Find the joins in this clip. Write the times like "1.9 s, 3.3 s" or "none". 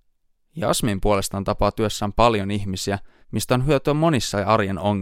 3.2 s